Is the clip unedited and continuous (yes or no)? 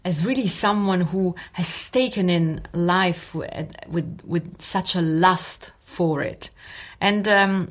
yes